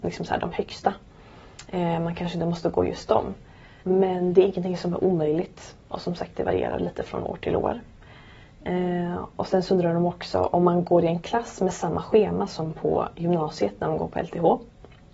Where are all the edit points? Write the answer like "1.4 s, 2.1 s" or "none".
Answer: 3.8 s